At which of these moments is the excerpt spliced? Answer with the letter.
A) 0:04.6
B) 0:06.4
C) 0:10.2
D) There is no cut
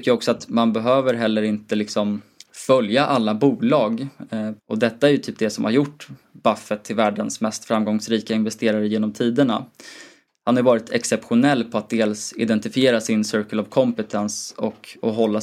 A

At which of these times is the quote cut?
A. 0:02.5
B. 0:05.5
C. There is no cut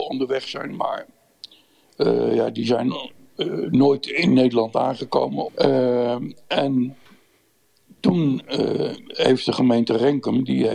B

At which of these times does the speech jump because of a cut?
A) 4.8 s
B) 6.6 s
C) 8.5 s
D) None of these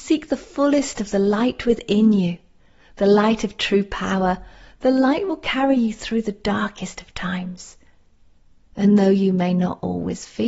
D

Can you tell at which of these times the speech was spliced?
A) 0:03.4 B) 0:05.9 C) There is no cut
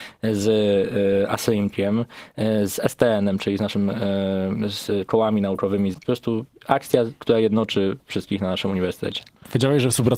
B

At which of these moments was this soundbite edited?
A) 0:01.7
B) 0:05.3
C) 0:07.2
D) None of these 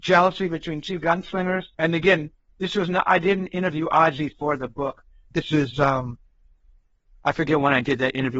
A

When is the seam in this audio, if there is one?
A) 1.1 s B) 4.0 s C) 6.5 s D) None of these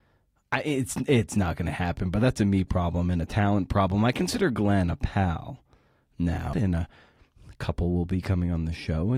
C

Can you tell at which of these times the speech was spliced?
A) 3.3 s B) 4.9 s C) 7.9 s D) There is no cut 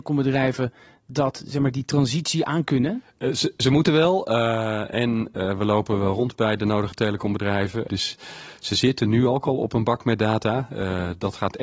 C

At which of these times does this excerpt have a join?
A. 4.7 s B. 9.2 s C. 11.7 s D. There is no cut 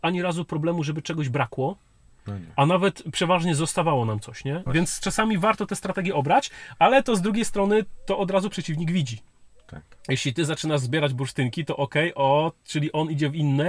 A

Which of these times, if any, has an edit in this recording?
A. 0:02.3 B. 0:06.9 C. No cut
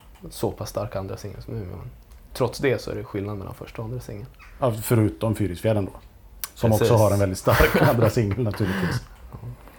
C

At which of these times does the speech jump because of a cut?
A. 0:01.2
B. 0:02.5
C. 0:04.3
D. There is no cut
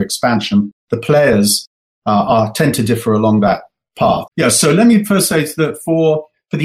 C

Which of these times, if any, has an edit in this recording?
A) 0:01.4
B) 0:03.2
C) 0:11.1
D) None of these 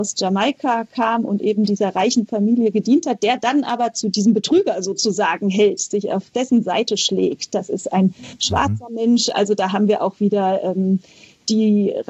D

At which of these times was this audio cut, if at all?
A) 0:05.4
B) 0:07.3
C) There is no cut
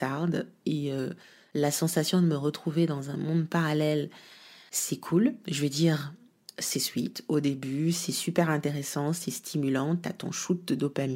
C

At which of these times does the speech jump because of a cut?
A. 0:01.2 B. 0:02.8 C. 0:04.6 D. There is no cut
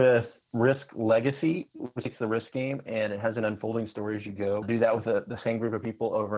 C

